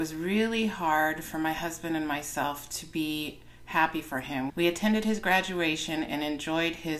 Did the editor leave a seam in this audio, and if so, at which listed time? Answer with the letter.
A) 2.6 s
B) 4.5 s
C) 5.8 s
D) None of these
B